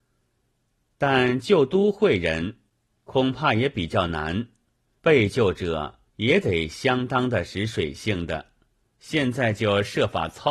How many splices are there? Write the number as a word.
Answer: three